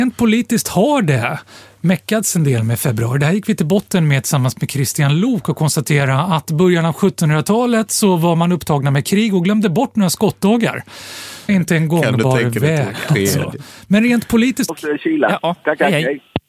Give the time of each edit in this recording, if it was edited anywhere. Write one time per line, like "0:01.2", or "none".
0:11.5
0:14.7